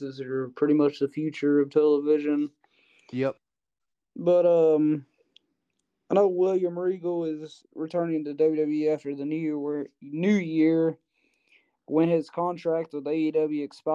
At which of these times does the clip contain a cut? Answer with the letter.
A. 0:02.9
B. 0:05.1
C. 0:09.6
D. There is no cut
D